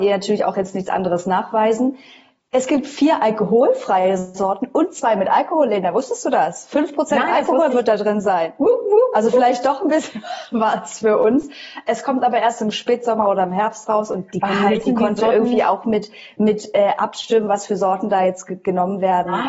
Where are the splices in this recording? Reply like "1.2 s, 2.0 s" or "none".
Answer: none